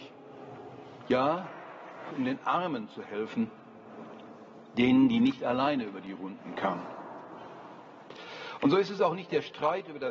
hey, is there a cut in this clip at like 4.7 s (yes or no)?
no